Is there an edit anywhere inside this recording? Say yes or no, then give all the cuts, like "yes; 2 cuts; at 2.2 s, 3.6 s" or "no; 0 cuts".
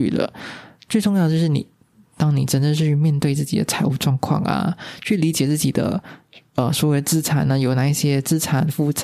no; 0 cuts